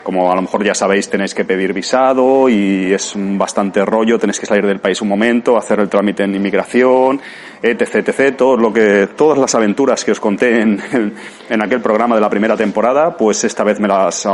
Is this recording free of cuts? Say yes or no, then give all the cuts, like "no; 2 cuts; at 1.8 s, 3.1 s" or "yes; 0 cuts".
yes; 0 cuts